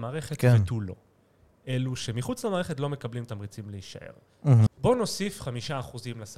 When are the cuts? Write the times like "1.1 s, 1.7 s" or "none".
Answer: 4.7 s